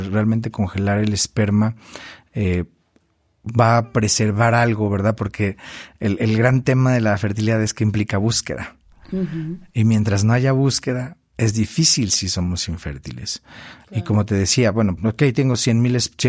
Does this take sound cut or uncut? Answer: cut